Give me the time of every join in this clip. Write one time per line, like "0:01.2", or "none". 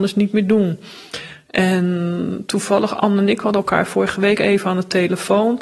none